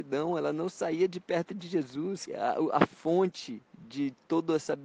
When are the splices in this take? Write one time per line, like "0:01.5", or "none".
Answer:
0:02.3